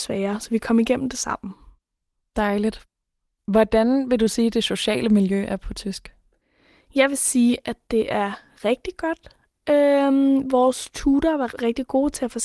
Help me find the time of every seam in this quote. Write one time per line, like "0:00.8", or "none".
none